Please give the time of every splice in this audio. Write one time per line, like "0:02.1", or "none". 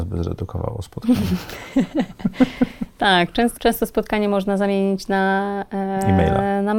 0:03.6